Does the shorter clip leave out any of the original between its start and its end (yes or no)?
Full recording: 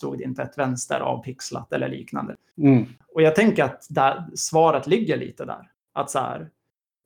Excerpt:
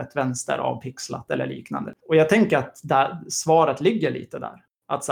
yes